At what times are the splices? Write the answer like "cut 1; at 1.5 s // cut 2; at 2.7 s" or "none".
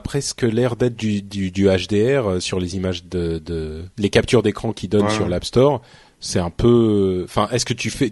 cut 1; at 3.9 s